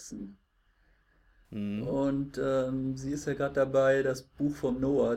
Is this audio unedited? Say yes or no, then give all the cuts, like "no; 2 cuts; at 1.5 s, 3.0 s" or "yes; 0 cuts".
yes; 0 cuts